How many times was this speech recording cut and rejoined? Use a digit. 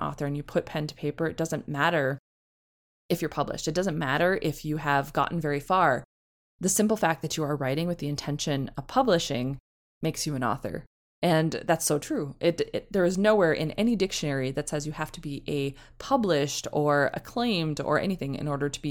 0